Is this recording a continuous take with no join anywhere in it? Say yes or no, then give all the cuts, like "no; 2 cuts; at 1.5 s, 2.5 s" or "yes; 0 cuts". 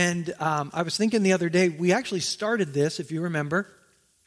yes; 0 cuts